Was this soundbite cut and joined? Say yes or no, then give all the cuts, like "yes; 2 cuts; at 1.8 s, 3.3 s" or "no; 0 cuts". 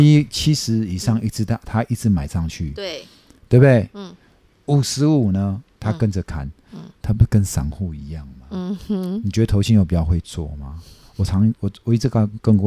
no; 0 cuts